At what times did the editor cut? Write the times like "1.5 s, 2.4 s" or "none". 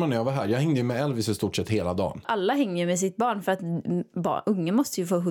2.2 s